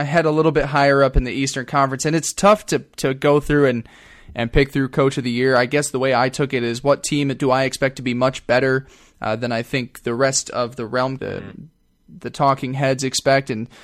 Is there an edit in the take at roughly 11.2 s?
yes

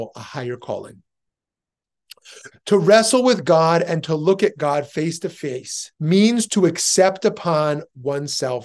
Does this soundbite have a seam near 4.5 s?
no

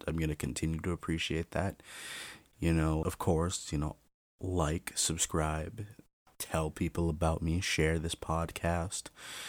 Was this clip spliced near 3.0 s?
yes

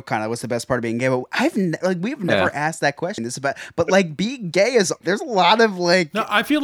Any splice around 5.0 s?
yes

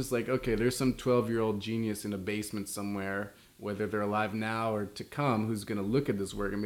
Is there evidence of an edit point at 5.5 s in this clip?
no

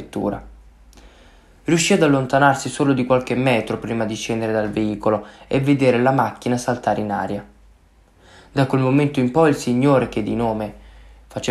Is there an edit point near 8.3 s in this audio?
no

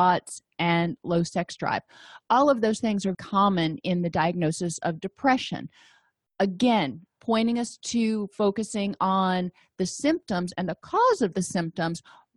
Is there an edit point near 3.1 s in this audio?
yes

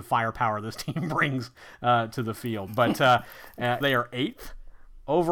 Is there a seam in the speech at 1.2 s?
no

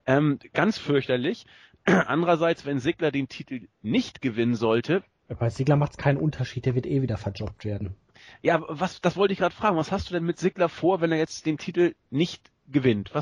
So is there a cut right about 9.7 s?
no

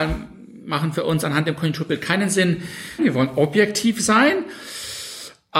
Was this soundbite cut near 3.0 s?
yes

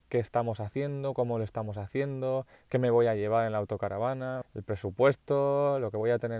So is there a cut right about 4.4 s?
yes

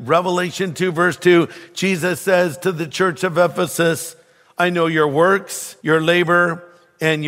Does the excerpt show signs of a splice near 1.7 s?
no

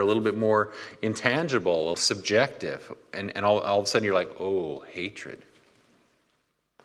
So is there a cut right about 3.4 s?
no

